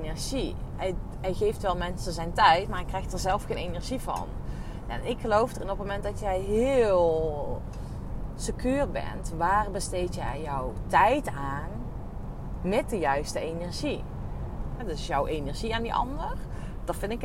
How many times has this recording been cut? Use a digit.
1